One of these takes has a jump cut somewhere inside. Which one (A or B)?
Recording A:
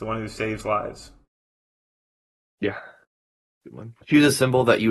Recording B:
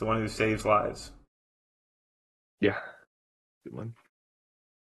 A